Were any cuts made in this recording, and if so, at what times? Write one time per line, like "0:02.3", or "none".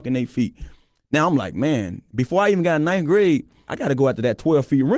0:03.7